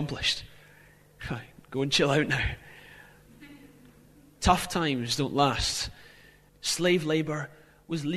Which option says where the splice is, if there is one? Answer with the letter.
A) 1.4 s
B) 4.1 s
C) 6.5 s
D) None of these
C